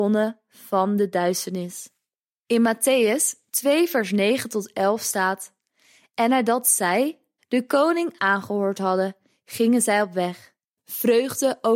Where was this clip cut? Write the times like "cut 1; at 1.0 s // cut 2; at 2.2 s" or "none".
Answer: cut 1; at 7.4 s // cut 2; at 10.8 s